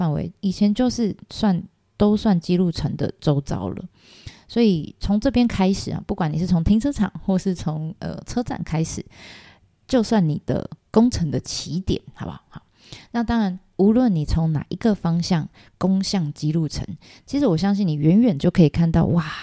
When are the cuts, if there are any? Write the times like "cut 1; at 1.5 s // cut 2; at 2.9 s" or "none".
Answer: none

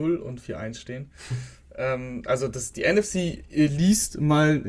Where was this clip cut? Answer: none

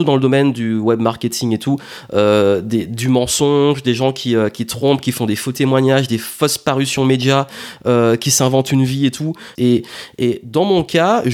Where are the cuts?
cut 1; at 9.6 s

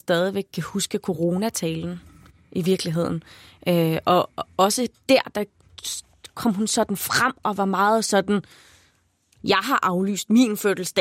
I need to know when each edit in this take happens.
none

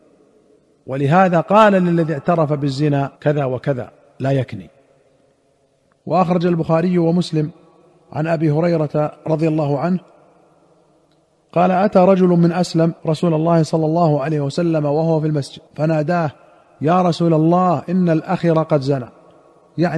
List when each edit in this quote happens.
cut 1; at 3.2 s // cut 2; at 13.0 s // cut 3; at 15.7 s

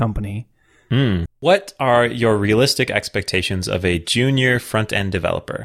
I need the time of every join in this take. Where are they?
cut 1; at 1.3 s

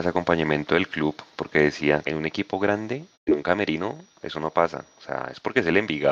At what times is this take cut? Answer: cut 1; at 2.0 s // cut 2; at 3.1 s

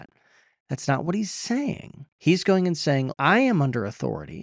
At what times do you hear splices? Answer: cut 1; at 2.1 s // cut 2; at 3.1 s

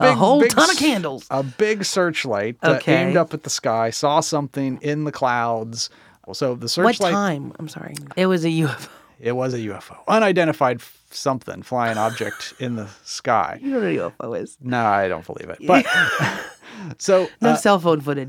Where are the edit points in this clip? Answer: cut 1; at 6.3 s // cut 2; at 8.1 s

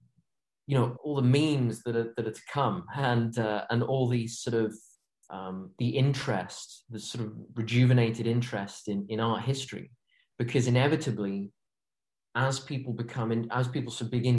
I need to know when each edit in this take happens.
cut 1; at 1.0 s

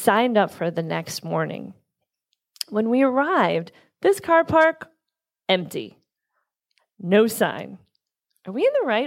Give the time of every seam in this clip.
none

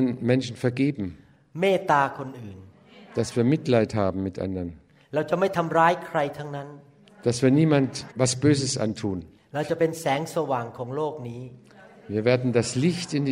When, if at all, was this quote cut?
cut 1; at 8.1 s // cut 2; at 9.4 s

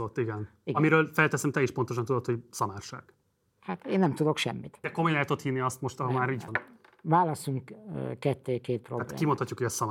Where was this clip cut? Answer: cut 1; at 4.8 s // cut 2; at 6.5 s

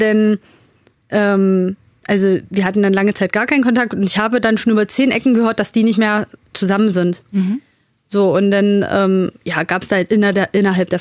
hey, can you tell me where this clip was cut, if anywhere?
none

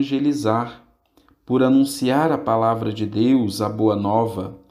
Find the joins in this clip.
none

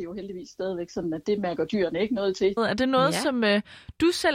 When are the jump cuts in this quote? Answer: cut 1; at 1.2 s // cut 2; at 2.6 s

